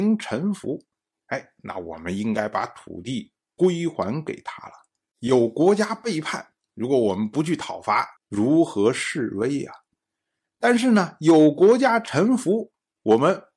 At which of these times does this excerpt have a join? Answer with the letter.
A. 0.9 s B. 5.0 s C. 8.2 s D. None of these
C